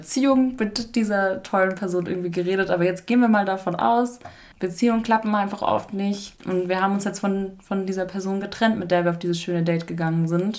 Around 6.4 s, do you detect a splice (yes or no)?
yes